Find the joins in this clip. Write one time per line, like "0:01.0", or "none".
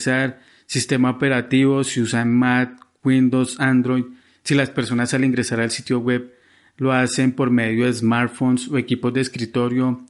none